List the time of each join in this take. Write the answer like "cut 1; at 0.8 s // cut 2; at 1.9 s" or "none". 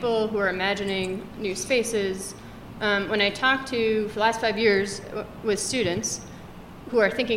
none